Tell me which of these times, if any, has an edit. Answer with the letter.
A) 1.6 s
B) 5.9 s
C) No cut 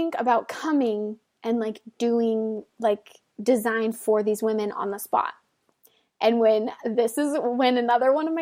C